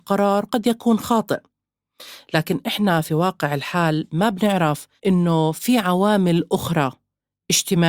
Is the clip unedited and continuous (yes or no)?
no